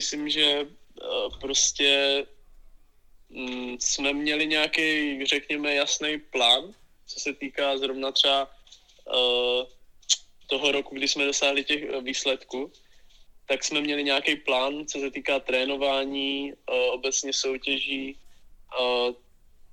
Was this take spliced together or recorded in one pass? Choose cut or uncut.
uncut